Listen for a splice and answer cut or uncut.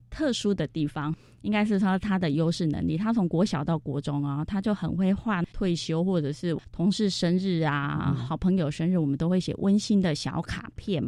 uncut